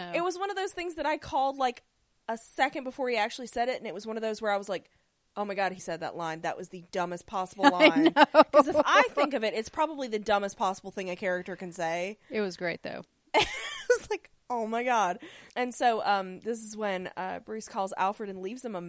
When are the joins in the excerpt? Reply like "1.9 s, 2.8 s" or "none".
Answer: 5.8 s, 15.5 s